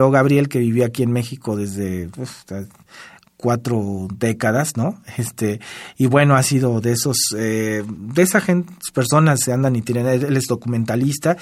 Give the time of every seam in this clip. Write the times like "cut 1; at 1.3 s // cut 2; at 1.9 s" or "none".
none

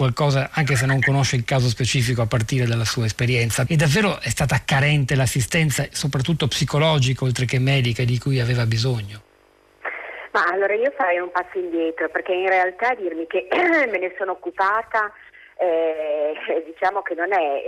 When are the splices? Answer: cut 1; at 3.7 s

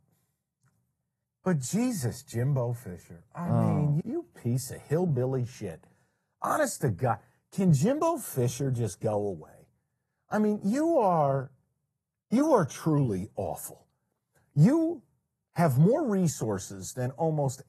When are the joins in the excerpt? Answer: cut 1; at 1.2 s // cut 2; at 4.0 s

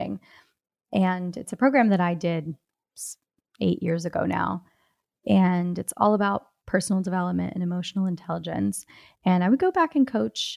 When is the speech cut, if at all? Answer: none

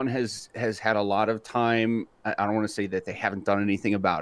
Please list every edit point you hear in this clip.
none

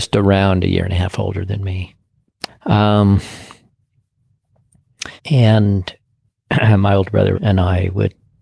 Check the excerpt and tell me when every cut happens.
cut 1; at 2.5 s // cut 2; at 5.2 s // cut 3; at 7.3 s

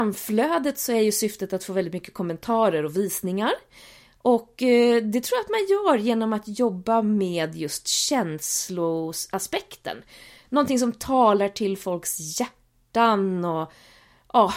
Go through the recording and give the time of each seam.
none

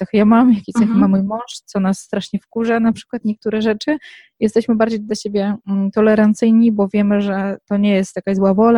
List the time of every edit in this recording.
none

